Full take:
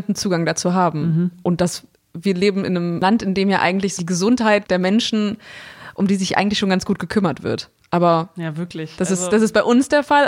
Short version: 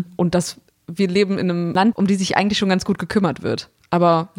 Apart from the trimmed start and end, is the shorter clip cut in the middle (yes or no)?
yes